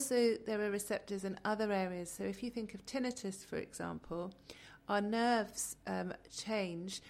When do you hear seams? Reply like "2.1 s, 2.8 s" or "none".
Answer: none